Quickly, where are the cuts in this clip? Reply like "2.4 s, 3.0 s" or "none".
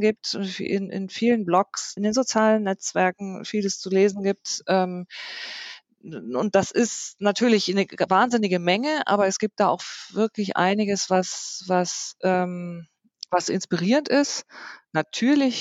2.0 s